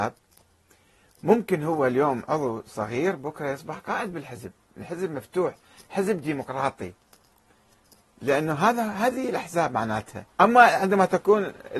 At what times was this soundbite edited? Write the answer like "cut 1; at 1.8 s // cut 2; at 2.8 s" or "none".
cut 1; at 10.3 s